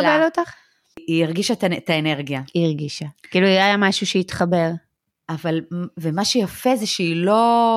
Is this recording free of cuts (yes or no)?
yes